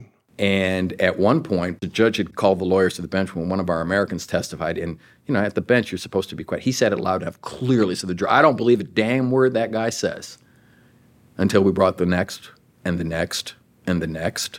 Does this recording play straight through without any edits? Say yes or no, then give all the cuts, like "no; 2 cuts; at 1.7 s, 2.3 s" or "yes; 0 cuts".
yes; 0 cuts